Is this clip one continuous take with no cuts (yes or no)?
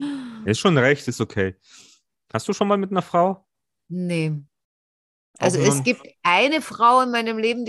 yes